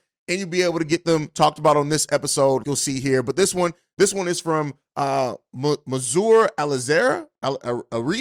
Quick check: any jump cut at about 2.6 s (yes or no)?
yes